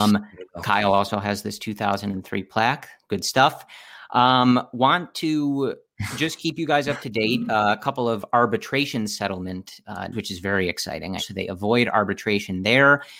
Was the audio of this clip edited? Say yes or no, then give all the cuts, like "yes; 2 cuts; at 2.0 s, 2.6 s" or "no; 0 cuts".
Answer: yes; 2 cuts; at 10.1 s, 11.2 s